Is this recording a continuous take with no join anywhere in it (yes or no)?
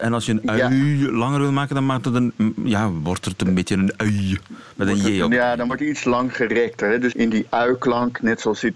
no